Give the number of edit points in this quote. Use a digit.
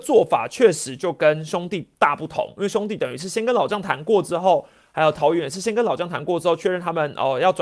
0